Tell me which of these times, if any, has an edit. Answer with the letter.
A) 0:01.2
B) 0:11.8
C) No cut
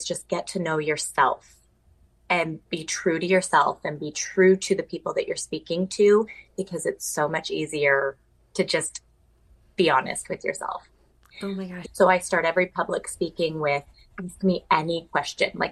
B